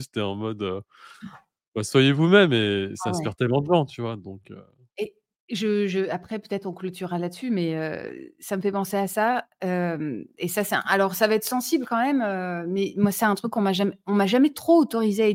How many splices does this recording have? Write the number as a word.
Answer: zero